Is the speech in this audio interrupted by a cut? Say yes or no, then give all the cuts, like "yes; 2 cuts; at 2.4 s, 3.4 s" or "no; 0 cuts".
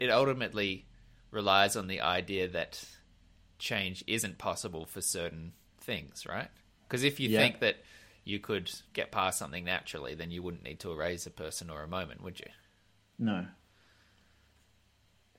yes; 1 cut; at 8.9 s